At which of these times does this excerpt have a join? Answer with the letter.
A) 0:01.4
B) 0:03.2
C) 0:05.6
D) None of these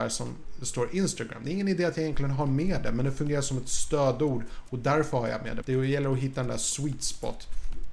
C